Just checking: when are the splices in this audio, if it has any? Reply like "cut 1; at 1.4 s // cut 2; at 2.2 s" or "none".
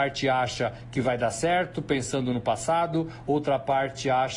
none